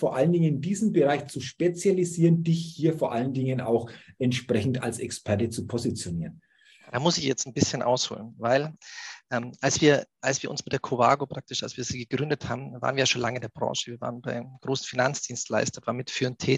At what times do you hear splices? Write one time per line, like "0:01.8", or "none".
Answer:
none

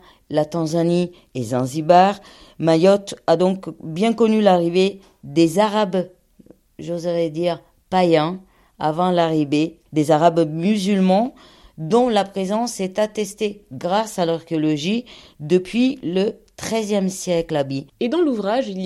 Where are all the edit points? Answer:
none

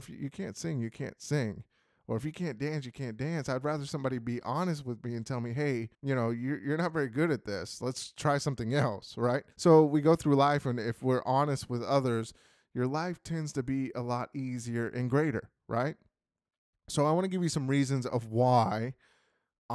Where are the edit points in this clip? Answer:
0:05.9
0:09.5

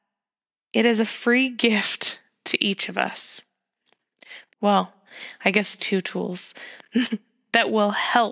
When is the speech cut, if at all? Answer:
0:04.5
0:05.8

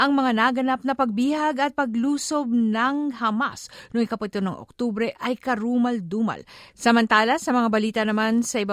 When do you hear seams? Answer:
0:06.7

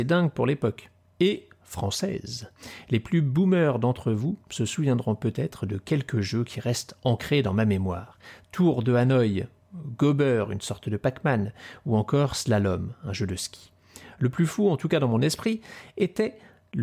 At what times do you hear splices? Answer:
none

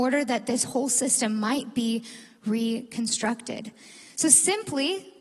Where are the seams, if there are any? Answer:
none

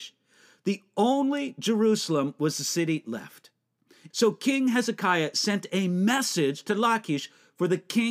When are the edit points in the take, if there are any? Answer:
0:04.1

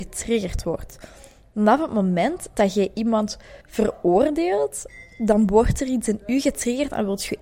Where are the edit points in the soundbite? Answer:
0:03.6

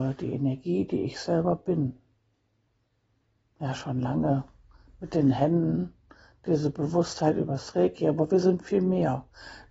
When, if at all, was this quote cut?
none

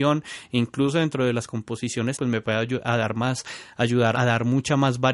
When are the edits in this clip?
0:02.1
0:04.1

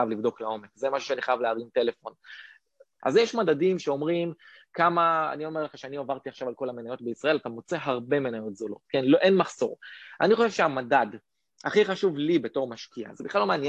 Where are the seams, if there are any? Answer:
0:03.0

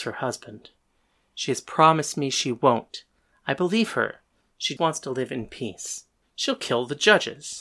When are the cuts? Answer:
0:04.8
0:06.2

